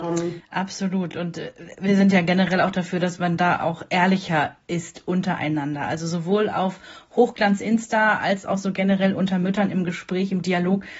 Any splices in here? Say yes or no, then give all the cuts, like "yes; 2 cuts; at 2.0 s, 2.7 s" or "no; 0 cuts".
no; 0 cuts